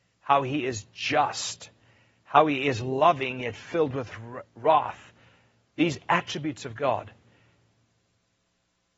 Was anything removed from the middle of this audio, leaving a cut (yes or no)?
no